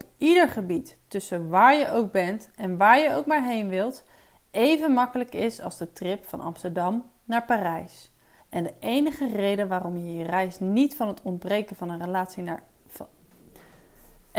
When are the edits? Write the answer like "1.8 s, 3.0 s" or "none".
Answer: 8.4 s